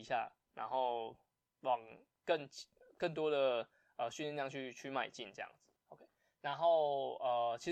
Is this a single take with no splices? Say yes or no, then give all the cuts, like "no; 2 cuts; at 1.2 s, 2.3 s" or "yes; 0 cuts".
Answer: no; 1 cut; at 5.8 s